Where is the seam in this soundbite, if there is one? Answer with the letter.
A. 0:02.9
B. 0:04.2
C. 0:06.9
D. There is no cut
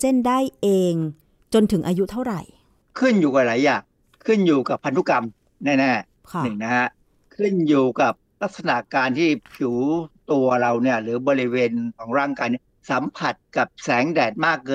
D